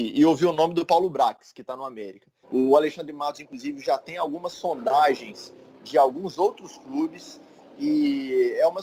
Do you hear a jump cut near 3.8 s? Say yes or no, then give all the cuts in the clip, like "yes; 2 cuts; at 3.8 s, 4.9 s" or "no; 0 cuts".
no; 1 cut; at 2.4 s